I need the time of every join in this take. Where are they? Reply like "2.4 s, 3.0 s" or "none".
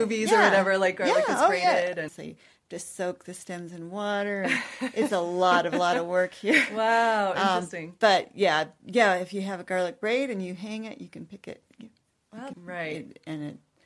2.1 s, 12.5 s

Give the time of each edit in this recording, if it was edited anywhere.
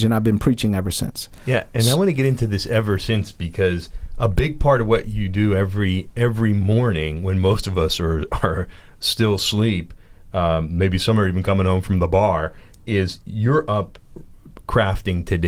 none

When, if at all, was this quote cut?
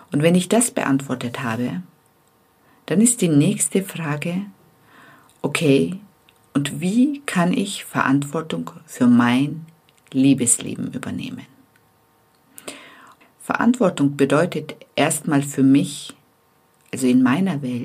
13.2 s

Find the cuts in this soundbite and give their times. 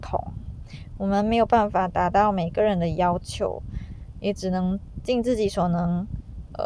none

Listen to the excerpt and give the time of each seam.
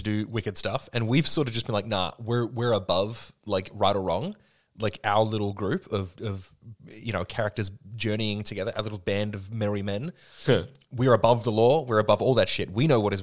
none

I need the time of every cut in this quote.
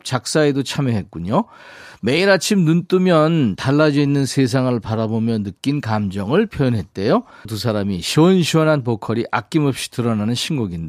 7.4 s

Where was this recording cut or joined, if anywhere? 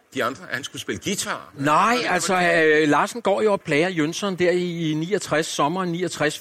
3.6 s

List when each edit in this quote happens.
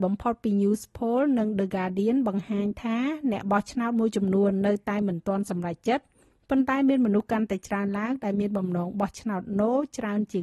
none

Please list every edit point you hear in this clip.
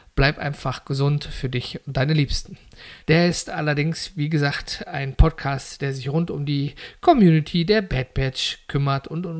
3.0 s

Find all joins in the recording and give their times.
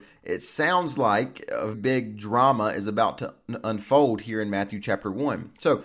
1.7 s

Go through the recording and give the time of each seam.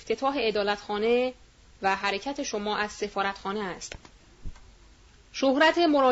none

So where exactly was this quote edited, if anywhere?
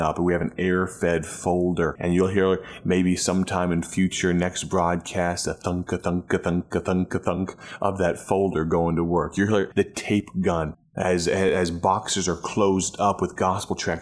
9.7 s

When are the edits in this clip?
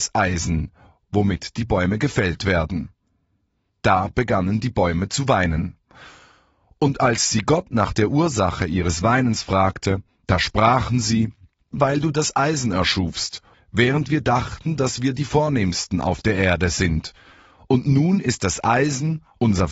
11.7 s, 13.5 s

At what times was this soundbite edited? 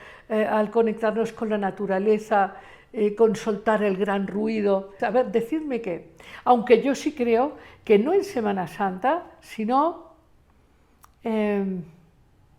5.0 s

